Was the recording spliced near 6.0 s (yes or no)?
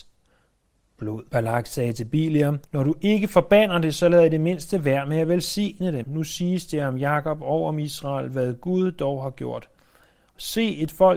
yes